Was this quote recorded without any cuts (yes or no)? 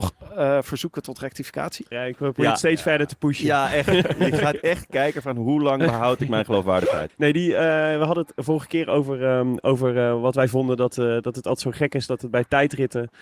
no